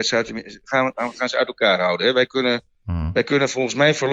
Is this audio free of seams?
yes; 0 cuts

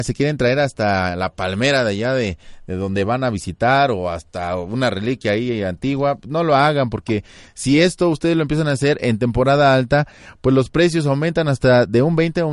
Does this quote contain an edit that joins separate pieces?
no; 0 cuts

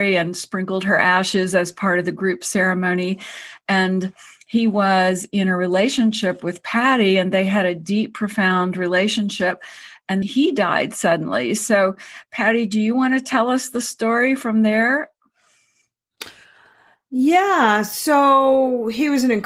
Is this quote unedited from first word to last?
no; 1 cut; at 10.2 s

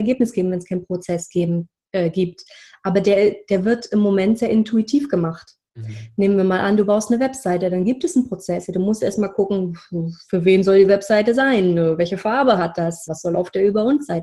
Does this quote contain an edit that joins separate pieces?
yes; 1 cut; at 13.1 s

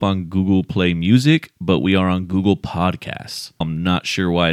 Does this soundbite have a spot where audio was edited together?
yes; 1 cut; at 3.6 s

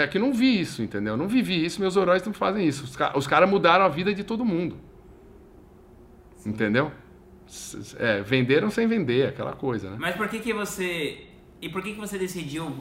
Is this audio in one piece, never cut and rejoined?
yes; 0 cuts

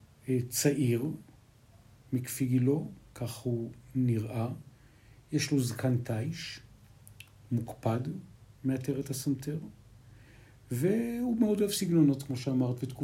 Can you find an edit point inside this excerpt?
no; 0 cuts

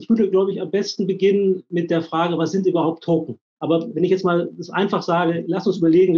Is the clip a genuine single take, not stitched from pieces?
no; 1 cut; at 3.6 s

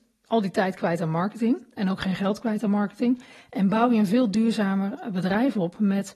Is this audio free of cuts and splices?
yes; 0 cuts

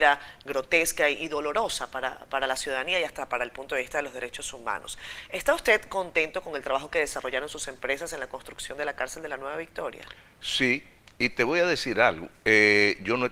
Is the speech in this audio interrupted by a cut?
no; 0 cuts

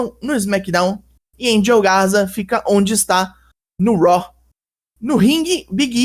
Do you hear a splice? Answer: no; 0 cuts

